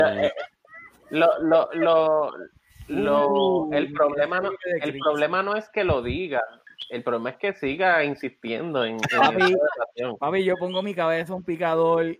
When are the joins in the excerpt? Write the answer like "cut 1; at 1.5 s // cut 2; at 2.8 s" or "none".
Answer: none